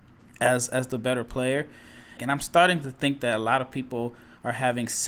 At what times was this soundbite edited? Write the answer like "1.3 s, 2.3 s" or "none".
2.2 s